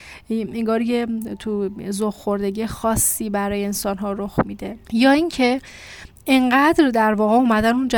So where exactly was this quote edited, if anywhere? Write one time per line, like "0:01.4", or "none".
0:04.8